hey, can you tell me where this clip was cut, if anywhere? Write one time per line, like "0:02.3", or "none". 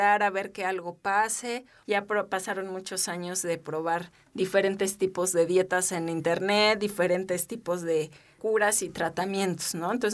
0:01.8